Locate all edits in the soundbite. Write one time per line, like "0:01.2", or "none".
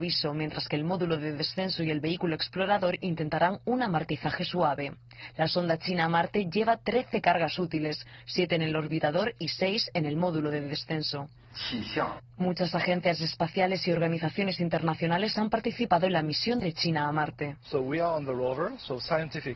0:12.2